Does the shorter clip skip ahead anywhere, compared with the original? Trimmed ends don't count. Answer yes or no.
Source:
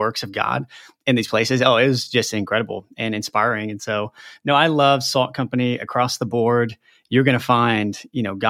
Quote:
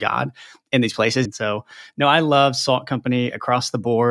yes